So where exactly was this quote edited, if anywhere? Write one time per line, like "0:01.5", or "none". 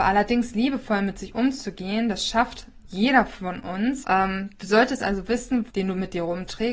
0:04.0
0:05.7